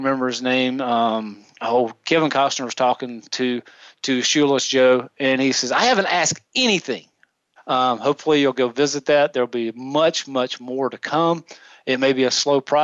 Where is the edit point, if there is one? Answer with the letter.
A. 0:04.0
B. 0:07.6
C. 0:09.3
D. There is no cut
B